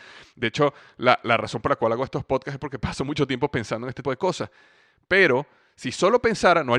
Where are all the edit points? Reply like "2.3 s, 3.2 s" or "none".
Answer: 4.0 s